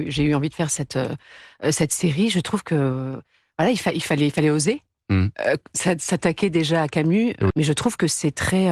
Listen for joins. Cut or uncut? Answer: cut